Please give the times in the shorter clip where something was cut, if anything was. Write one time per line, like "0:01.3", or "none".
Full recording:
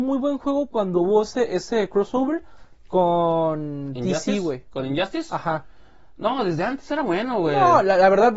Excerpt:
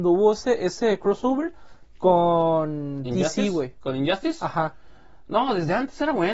none

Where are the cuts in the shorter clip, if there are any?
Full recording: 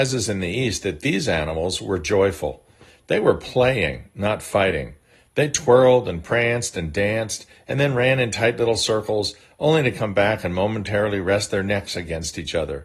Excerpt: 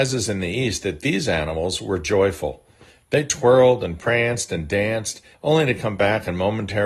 0:02.9
0:05.3

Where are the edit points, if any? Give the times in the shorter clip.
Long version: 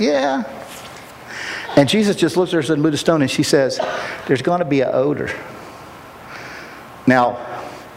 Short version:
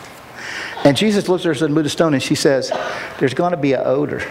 0:01.2

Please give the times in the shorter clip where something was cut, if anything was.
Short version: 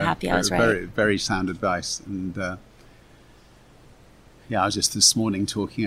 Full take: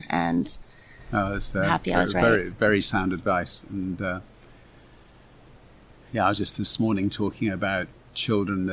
none

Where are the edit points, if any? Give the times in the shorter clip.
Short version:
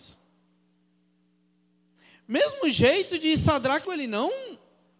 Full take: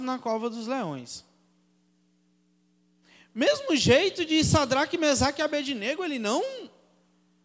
0:03.8

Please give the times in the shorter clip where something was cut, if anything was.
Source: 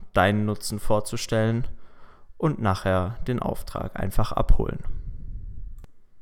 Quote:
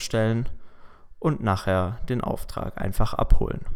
none

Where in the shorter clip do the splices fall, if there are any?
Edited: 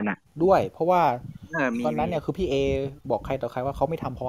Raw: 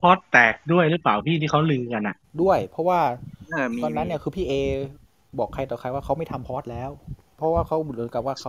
0:03.0

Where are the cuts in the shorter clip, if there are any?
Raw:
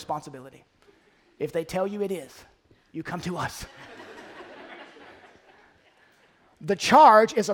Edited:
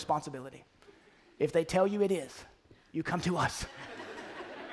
none

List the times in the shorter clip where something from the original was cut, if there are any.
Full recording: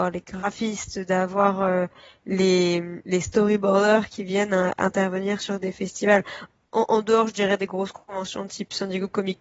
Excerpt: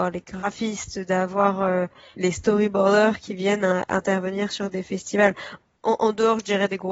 0:02.1

